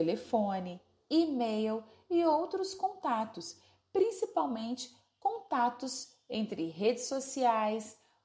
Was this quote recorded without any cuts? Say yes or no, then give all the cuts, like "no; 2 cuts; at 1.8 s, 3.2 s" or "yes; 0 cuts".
yes; 0 cuts